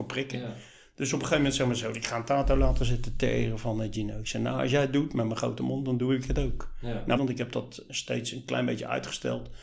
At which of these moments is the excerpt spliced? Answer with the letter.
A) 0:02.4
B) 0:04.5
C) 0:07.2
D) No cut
C